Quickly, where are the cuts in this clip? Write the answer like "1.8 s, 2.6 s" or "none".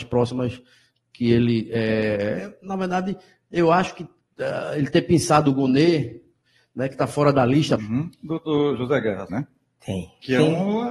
7.8 s, 9.3 s